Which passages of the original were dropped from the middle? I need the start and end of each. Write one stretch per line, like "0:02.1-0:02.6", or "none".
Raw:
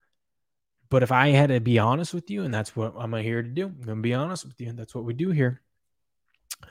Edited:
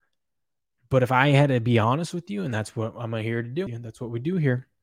0:03.7-0:04.6